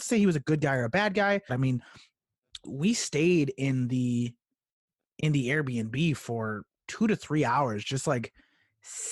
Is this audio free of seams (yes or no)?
no